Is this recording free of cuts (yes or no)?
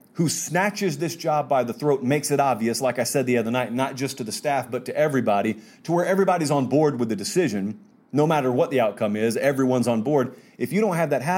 yes